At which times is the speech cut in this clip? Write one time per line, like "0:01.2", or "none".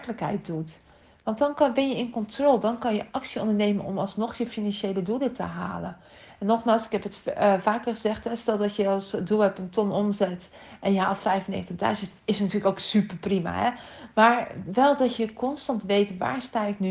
none